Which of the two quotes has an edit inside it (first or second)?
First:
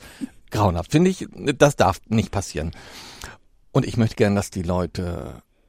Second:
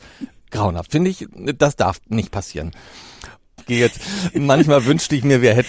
second